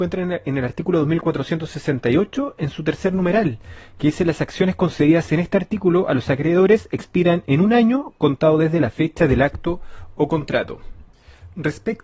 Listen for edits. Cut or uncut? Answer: uncut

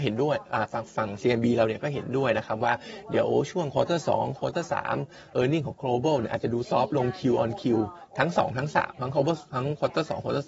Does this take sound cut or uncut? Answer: cut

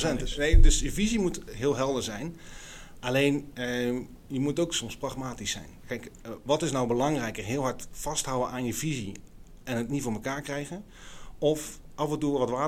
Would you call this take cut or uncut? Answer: cut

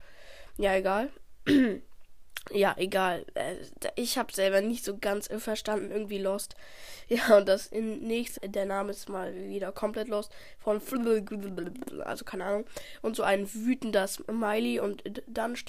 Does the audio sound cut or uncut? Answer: cut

